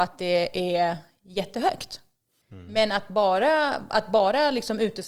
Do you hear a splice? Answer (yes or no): yes